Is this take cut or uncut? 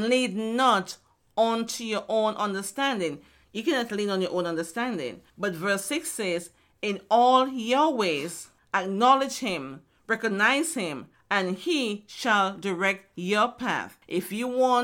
uncut